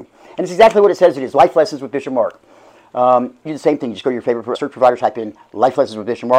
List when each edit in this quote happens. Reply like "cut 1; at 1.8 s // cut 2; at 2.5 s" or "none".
cut 1; at 3.5 s // cut 2; at 4.5 s